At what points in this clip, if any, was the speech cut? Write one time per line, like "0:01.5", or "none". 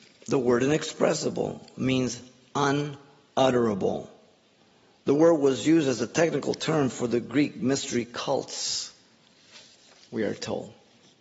none